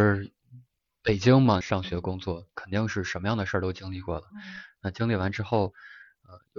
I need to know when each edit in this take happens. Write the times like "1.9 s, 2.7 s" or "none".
1.6 s

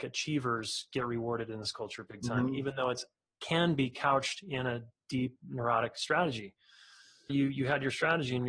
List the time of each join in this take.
7.3 s

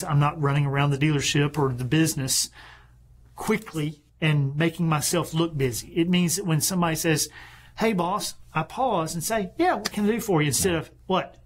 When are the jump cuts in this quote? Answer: 4.1 s

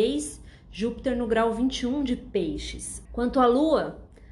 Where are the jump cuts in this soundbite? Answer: 3.1 s

